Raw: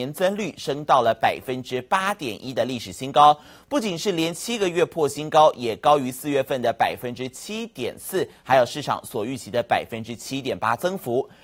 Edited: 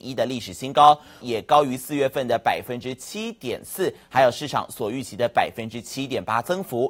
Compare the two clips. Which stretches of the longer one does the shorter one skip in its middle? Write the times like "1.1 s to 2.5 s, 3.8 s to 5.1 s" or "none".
3.6 s to 5.5 s